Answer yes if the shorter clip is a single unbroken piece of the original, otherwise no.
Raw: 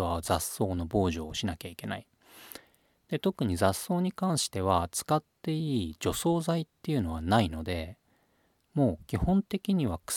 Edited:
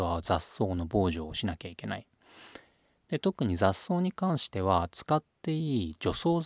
yes